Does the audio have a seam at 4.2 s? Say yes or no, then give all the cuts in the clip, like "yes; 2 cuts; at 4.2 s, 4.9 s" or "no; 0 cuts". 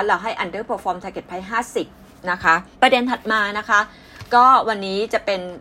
no; 1 cut; at 2.7 s